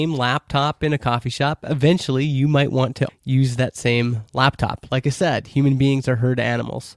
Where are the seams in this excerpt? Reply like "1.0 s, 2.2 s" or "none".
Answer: 3.1 s